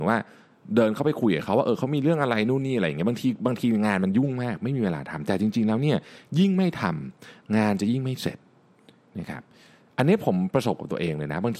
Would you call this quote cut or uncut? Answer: uncut